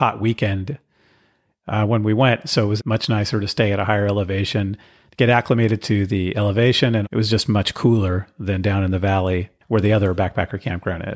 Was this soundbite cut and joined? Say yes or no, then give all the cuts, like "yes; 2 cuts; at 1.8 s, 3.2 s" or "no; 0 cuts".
yes; 2 cuts; at 2.8 s, 7.0 s